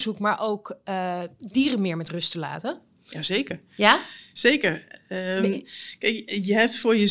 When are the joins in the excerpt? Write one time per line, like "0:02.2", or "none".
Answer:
none